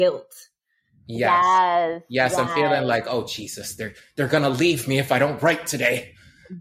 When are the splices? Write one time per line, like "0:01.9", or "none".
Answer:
none